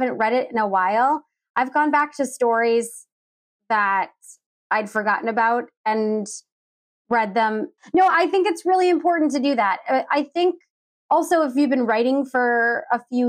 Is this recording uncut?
no; 1 cut; at 7.8 s

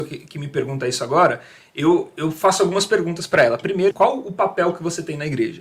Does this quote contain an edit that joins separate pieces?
yes; 1 cut; at 3.9 s

